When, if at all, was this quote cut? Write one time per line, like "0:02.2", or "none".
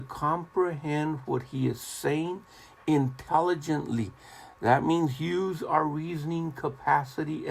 none